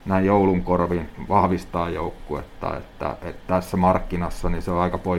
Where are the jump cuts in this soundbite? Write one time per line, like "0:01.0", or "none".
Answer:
none